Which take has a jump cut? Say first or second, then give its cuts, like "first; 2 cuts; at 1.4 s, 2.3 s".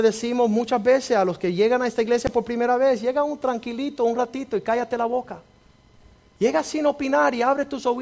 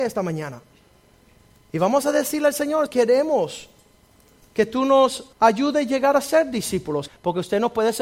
second; 3 cuts; at 2.9 s, 5.3 s, 7.1 s